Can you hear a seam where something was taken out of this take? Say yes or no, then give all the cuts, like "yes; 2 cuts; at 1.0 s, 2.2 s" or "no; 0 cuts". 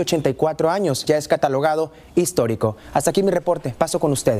yes; 1 cut; at 1.1 s